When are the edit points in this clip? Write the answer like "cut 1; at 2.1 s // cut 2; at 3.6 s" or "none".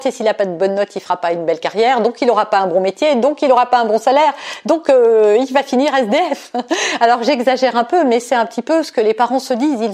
none